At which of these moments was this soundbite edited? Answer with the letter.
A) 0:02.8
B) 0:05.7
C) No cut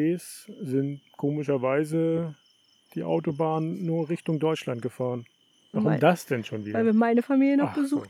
B